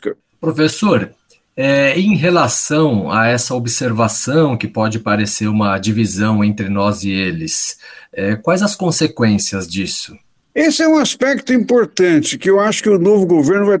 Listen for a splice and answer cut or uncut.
uncut